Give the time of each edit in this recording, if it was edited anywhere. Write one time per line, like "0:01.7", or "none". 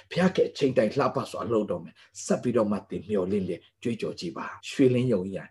0:04.6